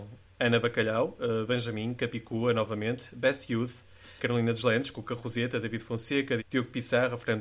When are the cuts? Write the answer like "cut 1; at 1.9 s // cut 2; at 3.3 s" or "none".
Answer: cut 1; at 4.2 s // cut 2; at 6.4 s